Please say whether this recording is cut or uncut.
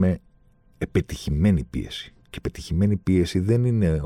uncut